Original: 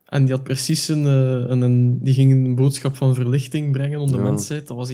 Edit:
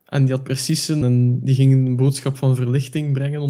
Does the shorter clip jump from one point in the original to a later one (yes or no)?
yes